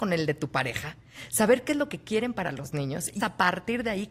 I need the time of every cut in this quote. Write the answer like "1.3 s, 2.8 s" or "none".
3.2 s

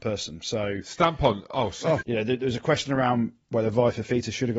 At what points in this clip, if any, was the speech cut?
2.0 s

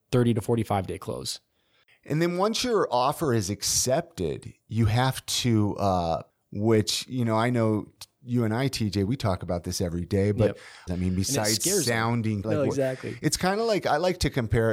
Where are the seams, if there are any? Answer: 6.3 s, 10.9 s, 12.4 s

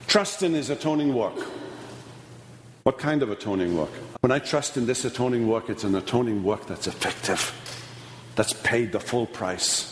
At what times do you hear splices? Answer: 2.8 s, 4.1 s

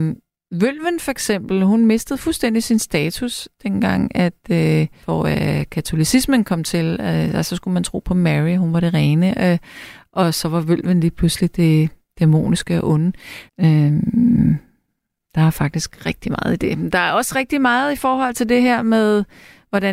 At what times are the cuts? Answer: 5.0 s, 13.5 s

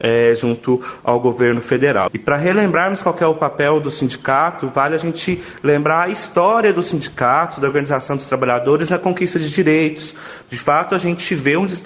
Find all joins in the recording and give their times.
2.1 s, 10.4 s

